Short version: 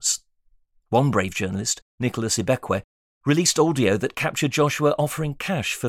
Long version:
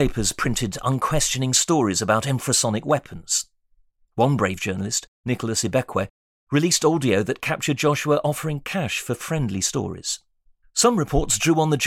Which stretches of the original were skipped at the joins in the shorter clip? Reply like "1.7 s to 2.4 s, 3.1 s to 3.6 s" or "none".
none

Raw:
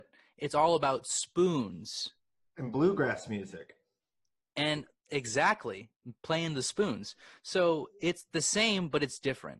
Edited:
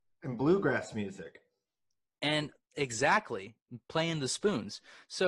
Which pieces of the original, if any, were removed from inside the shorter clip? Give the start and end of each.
none

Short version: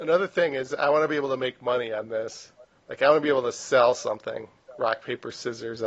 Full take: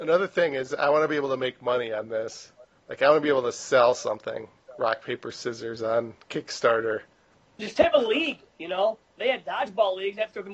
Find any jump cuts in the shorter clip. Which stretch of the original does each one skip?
none

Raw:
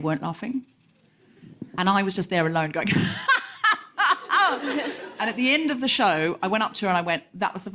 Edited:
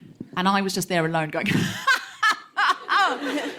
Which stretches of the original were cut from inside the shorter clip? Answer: none

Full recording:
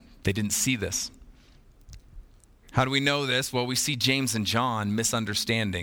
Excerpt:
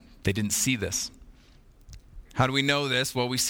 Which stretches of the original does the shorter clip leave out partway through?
2.3 s to 2.6 s

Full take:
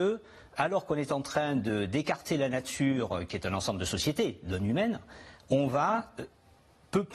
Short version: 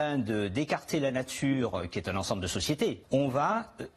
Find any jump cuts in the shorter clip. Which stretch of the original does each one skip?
4.4 s to 5.4 s

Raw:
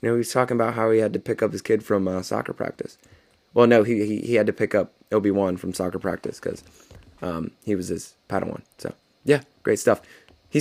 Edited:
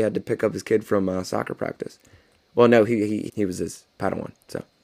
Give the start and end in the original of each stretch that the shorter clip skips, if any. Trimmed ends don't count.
4.3 s to 7.6 s

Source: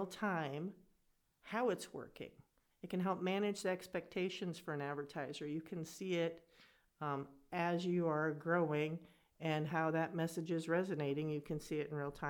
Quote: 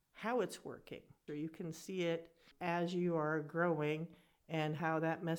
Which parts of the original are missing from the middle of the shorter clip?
2.6 s to 5.4 s, 6.6 s to 7.4 s

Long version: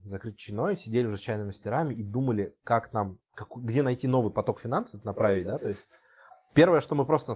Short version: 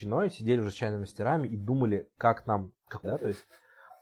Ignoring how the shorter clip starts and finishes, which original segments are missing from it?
3.5 s to 5.4 s

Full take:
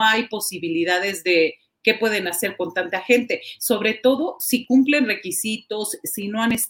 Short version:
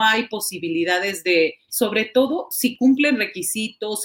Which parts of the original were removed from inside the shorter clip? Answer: 1.7 s to 3.6 s

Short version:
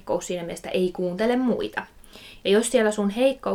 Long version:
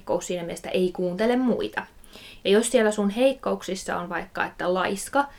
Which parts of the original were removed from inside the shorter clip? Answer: none

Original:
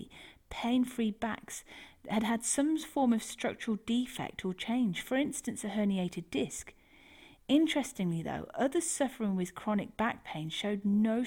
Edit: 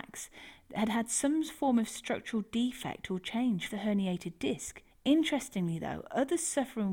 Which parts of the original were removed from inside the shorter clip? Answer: 5.0 s to 5.6 s, 6.8 s to 7.3 s

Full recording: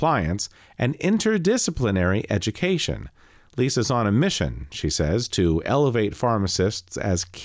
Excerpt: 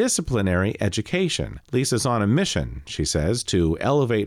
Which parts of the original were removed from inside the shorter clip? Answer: 3.1 s to 3.5 s

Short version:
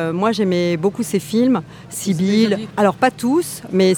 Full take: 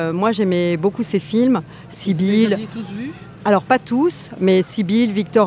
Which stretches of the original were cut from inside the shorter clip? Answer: 2.7 s to 3.4 s

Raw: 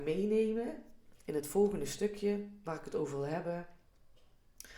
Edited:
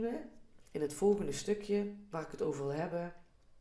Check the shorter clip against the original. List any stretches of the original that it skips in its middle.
none

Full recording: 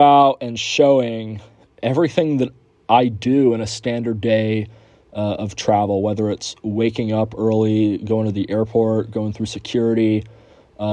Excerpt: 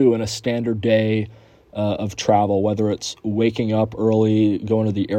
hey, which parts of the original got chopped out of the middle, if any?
none

